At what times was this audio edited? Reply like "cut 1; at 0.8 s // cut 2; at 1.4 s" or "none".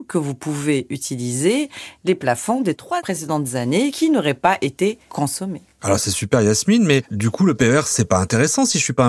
none